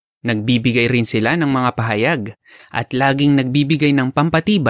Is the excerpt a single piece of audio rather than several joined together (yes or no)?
no